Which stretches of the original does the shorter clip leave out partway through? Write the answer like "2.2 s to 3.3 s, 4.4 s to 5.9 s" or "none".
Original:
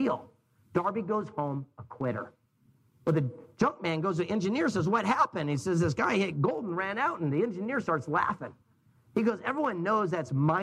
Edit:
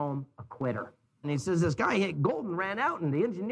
2.6 s to 5.4 s